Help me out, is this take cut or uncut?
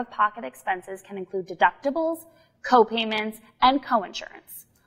uncut